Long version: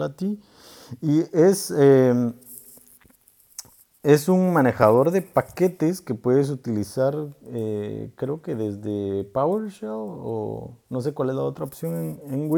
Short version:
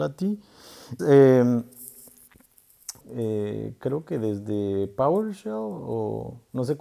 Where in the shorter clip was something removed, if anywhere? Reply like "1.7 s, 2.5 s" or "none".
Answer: 1.0 s, 3.0 s